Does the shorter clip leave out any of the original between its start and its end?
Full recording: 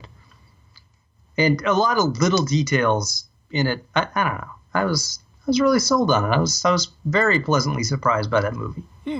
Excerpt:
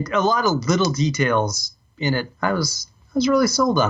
yes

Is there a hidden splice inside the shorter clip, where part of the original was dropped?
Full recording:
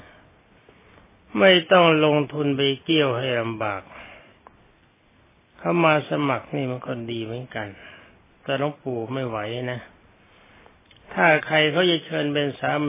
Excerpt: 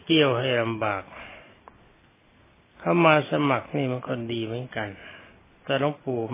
no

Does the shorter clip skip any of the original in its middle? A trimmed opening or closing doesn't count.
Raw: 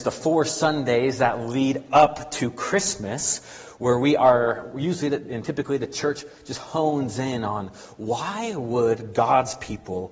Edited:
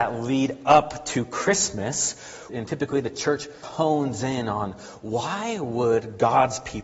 yes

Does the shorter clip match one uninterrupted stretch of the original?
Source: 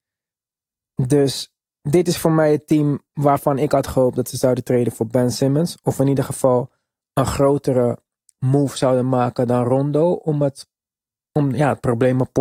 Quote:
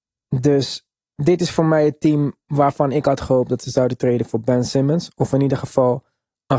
yes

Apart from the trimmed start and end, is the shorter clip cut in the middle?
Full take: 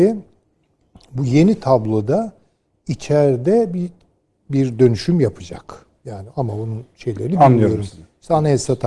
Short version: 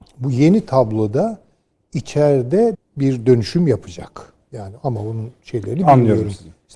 yes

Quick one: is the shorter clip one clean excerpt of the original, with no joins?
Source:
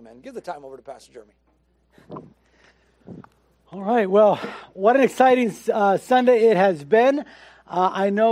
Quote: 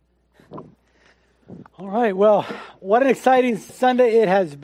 no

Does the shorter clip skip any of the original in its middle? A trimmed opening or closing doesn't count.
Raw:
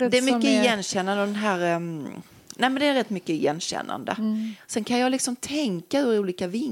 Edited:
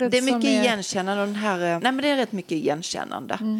yes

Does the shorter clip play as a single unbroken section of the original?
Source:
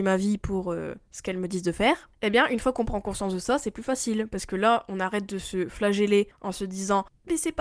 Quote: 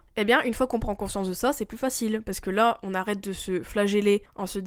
yes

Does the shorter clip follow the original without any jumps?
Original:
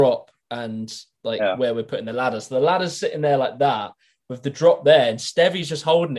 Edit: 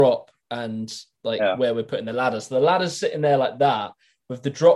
yes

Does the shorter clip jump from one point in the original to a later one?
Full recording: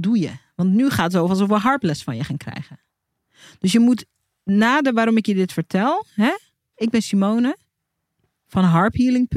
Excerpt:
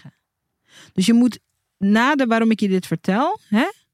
no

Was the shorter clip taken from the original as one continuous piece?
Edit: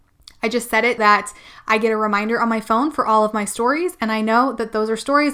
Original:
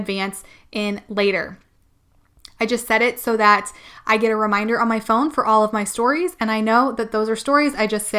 no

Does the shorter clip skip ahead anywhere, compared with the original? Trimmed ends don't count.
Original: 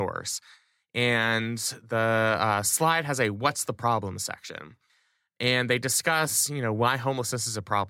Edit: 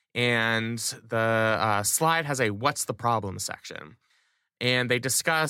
no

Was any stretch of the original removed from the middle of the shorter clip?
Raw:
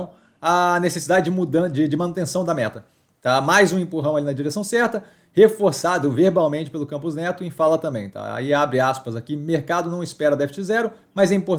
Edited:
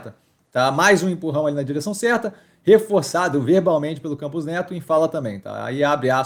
no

